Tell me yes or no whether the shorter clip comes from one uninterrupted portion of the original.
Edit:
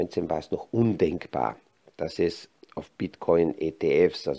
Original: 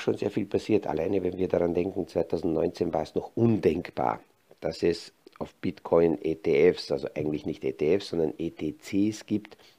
yes